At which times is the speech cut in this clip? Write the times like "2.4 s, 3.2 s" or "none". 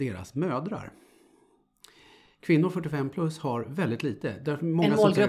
none